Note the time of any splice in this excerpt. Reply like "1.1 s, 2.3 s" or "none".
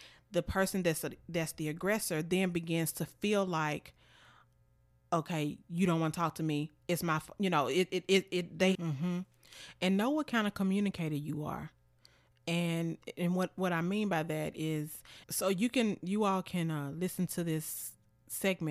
8.7 s, 15.2 s